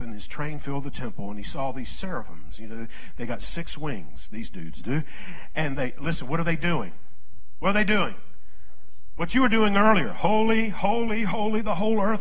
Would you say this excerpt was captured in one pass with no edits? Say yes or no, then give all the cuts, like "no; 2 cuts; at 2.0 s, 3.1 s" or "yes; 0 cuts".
yes; 0 cuts